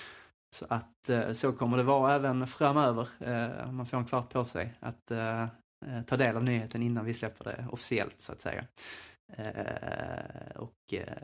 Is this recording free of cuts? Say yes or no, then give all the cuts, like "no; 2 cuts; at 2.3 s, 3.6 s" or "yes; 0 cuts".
yes; 0 cuts